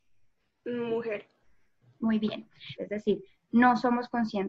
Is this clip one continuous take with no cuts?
no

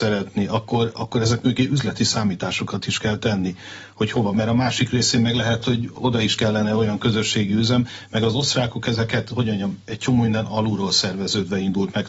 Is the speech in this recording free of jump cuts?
yes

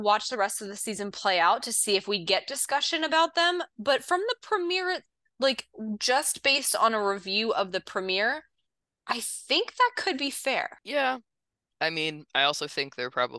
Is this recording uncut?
yes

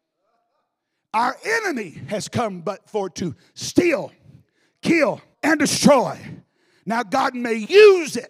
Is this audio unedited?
no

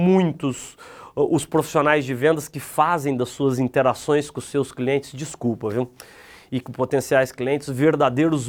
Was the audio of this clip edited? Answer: no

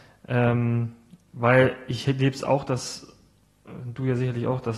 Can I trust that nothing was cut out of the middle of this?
yes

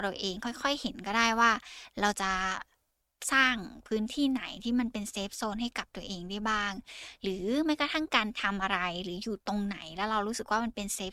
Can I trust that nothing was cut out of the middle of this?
yes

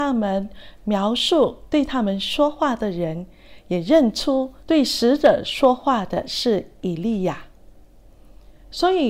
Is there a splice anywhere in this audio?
yes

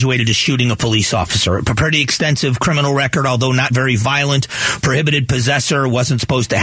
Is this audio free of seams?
yes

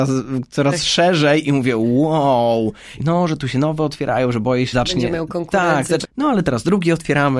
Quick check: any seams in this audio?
yes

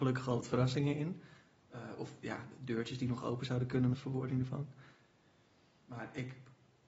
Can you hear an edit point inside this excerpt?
yes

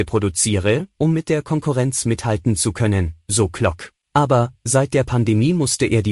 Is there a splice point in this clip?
yes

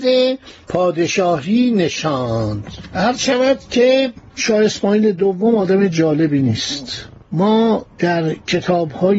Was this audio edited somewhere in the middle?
no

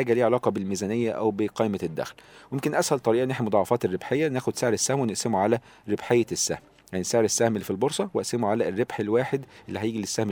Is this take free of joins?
yes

